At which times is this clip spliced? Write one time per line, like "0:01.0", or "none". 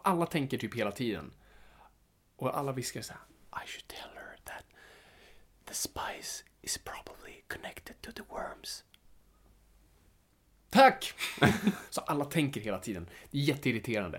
0:11.9